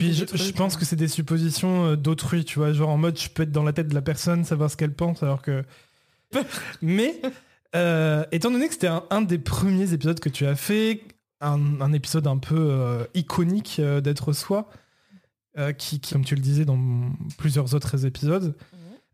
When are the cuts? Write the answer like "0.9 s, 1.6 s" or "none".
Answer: 6.3 s, 16.1 s